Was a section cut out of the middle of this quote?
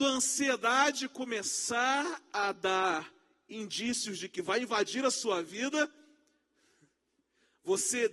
no; 0 cuts

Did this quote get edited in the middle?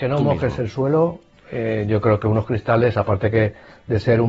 no; 0 cuts

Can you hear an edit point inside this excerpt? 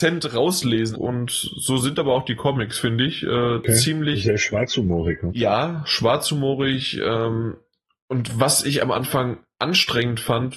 yes; 2 cuts; at 0.9 s, 5.3 s

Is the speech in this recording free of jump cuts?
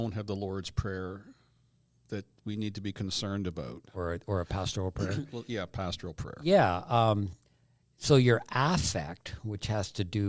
yes; 0 cuts

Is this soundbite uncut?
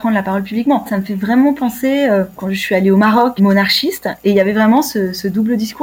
yes; 0 cuts

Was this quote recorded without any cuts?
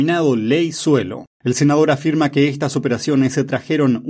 no; 1 cut; at 1.3 s

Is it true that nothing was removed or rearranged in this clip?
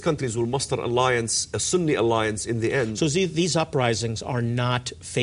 yes; 0 cuts

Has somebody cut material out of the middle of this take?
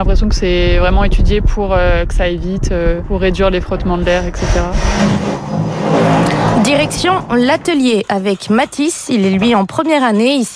no; 0 cuts

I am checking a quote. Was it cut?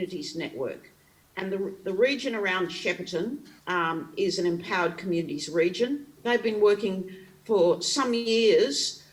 yes; 2 cuts; at 3.6 s, 6.1 s

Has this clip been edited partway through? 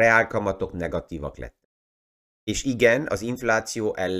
yes; 1 cut; at 2.3 s

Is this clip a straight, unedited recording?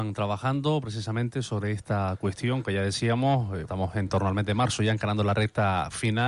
no; 1 cut; at 3.6 s

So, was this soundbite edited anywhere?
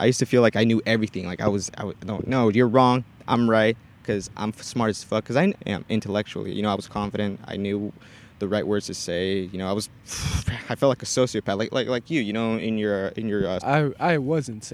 yes; 2 cuts; at 5.5 s, 13.6 s

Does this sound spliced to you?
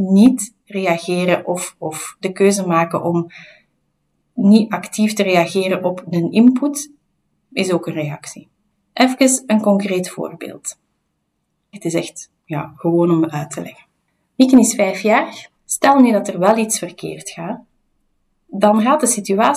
yes; 2 cuts; at 11.7 s, 15.5 s

